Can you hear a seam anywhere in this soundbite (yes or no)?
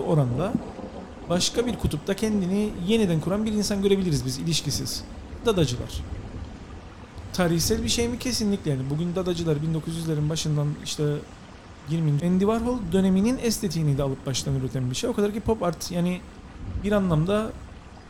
yes